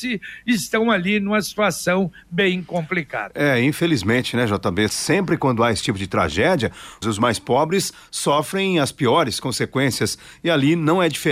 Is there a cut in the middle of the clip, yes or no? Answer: yes